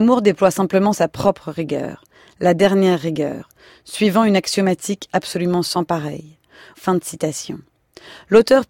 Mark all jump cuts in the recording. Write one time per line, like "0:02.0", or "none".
0:06.7